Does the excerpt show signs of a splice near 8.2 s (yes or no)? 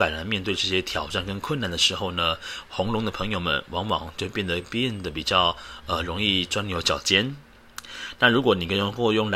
no